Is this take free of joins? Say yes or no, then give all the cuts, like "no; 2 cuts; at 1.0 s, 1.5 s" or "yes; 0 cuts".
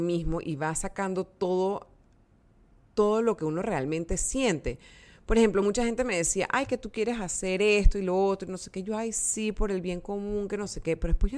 yes; 0 cuts